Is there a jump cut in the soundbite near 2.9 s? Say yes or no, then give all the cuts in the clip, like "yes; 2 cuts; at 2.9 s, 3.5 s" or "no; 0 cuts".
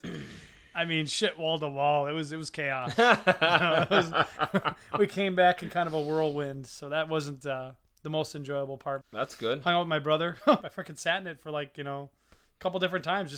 no; 2 cuts; at 9.0 s, 10.6 s